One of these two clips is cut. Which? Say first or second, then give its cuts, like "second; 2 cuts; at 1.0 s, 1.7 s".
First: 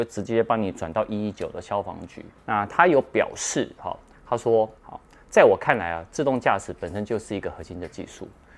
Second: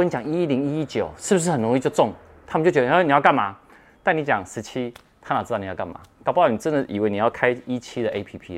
first; 2 cuts; at 2.4 s, 4.8 s